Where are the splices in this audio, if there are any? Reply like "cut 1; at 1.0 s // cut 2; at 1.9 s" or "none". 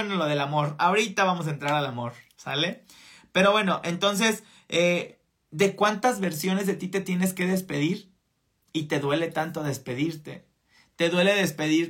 none